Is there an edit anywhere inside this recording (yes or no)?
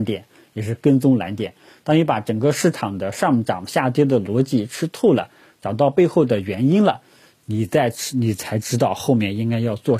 no